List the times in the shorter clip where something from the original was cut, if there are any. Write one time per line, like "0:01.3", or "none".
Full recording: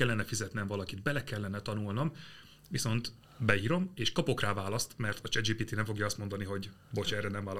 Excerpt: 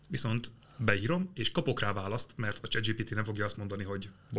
none